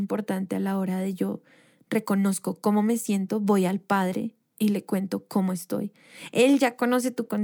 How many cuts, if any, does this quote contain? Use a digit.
0